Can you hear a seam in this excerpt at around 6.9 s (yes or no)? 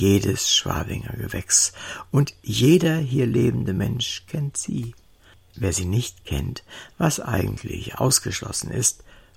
no